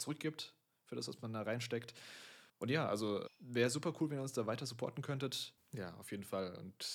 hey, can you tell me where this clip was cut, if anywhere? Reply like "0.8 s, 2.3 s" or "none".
2.5 s, 5.6 s